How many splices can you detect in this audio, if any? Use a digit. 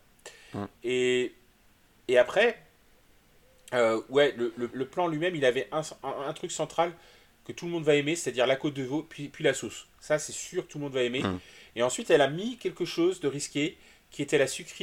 1